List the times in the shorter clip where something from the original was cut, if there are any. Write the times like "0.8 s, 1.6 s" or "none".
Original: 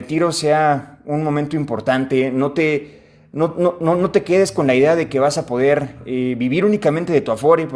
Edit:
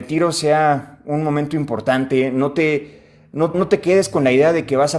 3.5 s